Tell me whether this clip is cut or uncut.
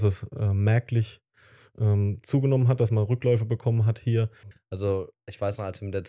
cut